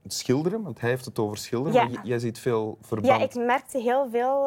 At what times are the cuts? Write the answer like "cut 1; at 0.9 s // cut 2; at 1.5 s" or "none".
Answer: none

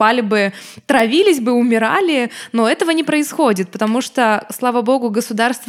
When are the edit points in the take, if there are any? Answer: none

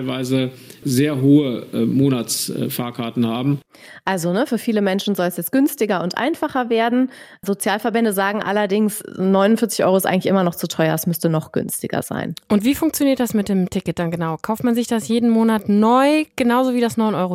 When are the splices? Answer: none

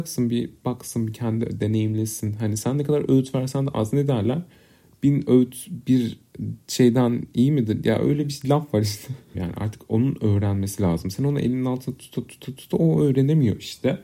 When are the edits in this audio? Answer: cut 1; at 9.3 s

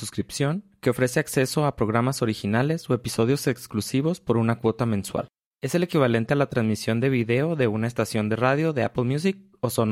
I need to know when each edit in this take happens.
cut 1; at 5.5 s

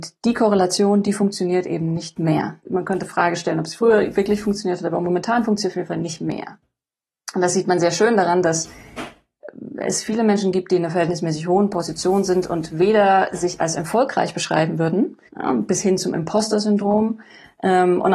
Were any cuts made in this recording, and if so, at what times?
cut 1; at 2.6 s // cut 2; at 15.3 s

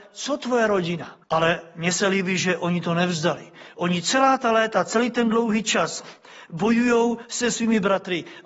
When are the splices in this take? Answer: cut 1; at 1.2 s

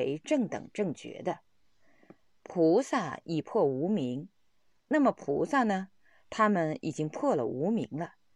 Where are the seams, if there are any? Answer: none

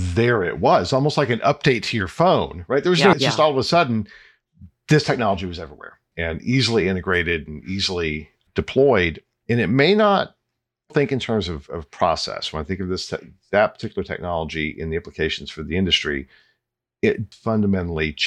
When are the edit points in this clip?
cut 1; at 3.1 s // cut 2; at 10.9 s // cut 3; at 17.3 s

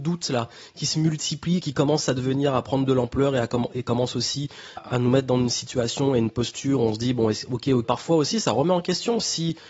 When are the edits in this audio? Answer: cut 1; at 4.8 s // cut 2; at 7.8 s

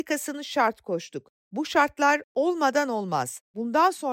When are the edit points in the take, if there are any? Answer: none

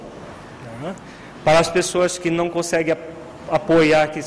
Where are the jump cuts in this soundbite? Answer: none

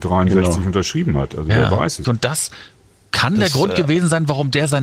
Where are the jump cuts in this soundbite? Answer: cut 1; at 2.0 s

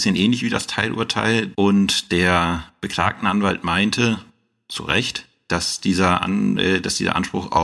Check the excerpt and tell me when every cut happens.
cut 1; at 1.5 s

